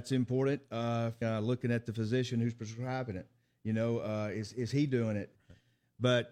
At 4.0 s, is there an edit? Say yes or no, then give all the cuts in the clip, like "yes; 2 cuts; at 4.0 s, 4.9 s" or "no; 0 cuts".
no; 2 cuts; at 1.2 s, 5.4 s